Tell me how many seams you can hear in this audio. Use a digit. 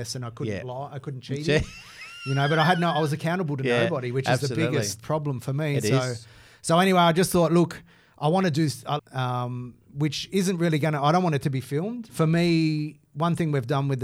2